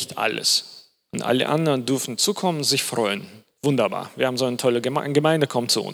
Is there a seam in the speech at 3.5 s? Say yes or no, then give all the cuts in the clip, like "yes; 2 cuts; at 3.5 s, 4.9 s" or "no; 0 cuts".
yes; 1 cut; at 3.5 s